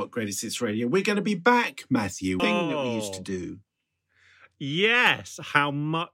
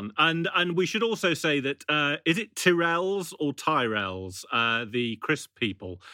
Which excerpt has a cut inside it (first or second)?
first